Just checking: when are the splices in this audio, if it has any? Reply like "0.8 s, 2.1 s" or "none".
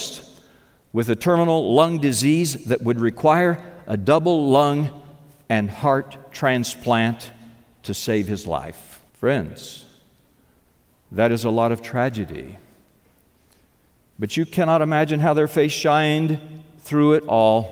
9.1 s